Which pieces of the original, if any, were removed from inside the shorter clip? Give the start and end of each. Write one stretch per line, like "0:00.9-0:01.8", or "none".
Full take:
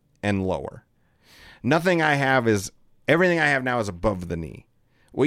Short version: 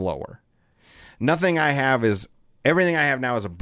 none